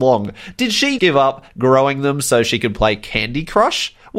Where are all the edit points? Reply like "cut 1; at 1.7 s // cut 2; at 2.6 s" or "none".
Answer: cut 1; at 1.0 s